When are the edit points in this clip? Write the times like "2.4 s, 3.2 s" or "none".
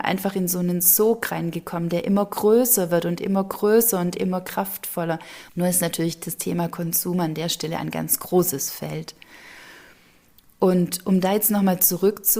5.5 s